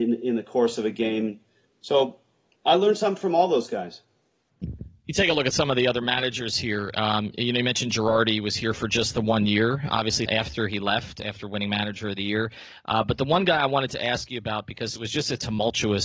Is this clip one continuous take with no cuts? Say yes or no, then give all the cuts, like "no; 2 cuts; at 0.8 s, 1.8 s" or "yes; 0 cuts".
no; 1 cut; at 10.3 s